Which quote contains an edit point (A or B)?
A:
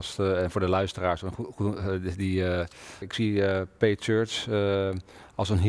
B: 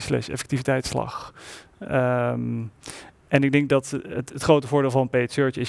A